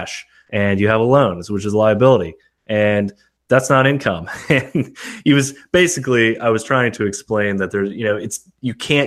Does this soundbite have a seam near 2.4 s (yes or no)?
no